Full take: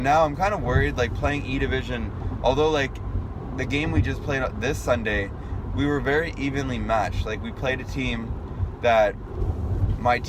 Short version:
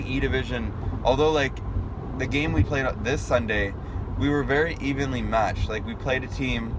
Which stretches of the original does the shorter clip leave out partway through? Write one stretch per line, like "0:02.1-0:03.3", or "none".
0:04.0-0:04.2